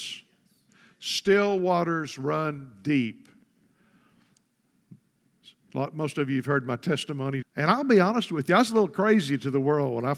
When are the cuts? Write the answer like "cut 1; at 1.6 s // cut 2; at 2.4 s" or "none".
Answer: cut 1; at 7.4 s